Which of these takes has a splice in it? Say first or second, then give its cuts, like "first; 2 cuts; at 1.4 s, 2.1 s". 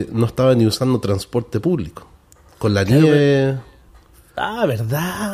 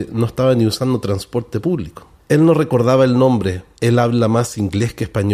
second; 1 cut; at 2.2 s